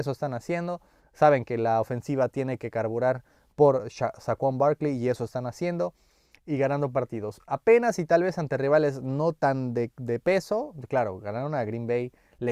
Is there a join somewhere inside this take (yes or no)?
no